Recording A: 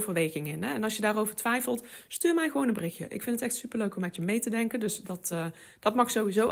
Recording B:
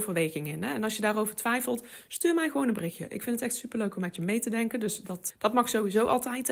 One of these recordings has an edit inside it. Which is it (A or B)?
B